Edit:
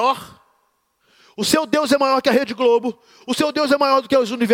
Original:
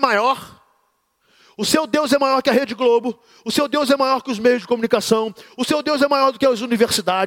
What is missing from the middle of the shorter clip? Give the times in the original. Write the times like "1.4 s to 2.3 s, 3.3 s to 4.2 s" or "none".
3.4 s to 5.5 s